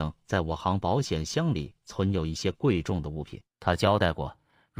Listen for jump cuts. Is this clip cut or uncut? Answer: cut